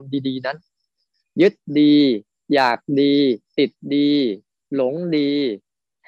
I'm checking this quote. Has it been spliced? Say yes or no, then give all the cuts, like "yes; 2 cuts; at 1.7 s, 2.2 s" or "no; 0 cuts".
no; 0 cuts